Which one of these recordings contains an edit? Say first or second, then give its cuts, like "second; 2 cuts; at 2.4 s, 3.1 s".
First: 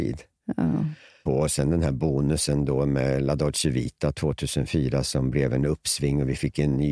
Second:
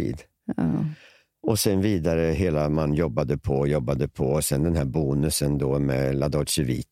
first; 1 cut; at 1.3 s